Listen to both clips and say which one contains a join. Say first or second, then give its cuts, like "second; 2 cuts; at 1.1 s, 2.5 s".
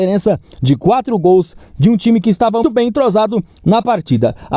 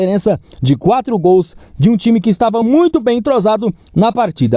first; 1 cut; at 2.6 s